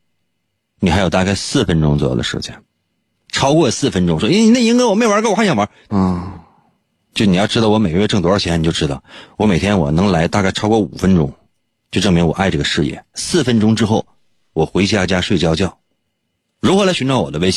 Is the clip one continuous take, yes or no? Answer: no